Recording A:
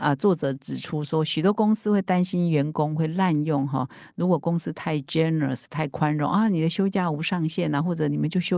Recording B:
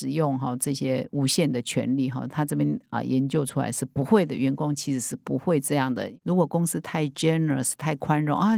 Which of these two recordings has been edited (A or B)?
B